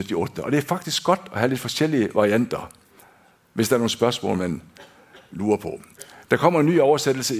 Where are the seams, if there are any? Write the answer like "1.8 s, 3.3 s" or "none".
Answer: none